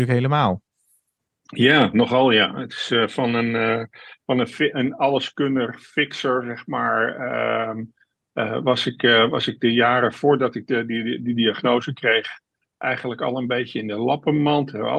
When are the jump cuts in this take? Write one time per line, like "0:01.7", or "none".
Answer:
none